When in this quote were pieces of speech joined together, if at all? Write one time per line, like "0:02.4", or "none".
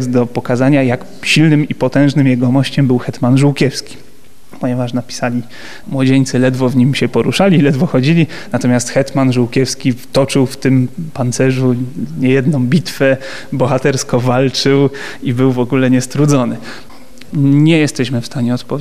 0:05.8
0:17.3